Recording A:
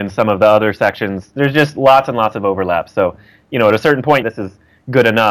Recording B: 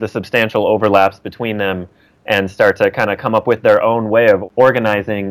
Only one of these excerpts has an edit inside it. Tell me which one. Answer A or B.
A